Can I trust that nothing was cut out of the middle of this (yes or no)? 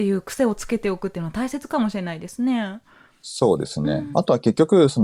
no